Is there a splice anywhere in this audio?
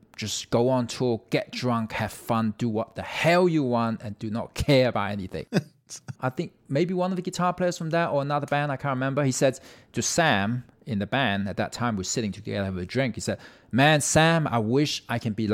yes; 1 cut; at 6.2 s

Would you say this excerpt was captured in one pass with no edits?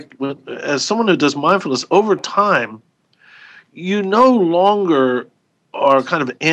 yes; 0 cuts

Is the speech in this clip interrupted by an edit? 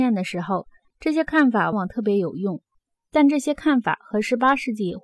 yes; 1 cut; at 1.7 s

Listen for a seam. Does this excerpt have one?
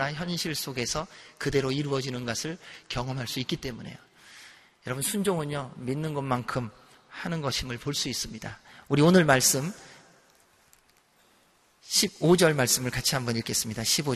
no; 0 cuts

